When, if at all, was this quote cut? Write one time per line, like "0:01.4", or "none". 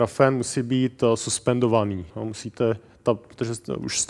0:02.1

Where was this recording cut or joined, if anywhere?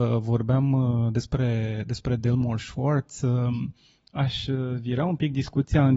none

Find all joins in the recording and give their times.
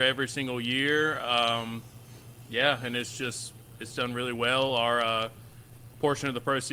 none

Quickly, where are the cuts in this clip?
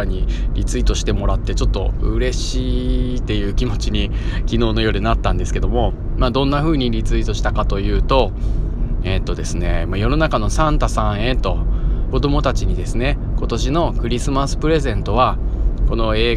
0:12.1

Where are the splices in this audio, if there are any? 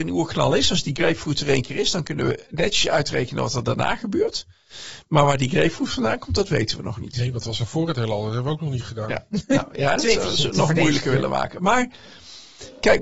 0:10.0

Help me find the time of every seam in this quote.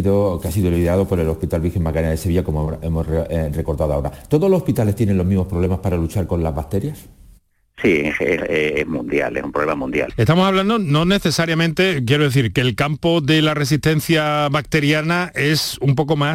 0:08.4
0:10.1

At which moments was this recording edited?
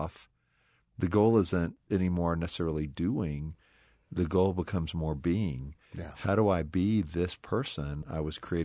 none

